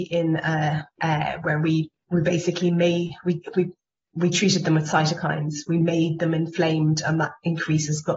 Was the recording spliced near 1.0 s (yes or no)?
yes